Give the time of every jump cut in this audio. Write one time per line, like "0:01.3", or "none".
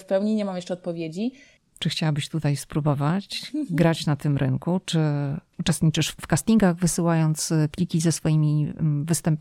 0:01.6